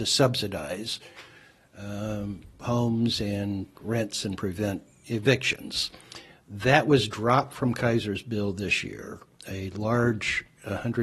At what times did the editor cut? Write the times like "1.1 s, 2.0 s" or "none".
3.7 s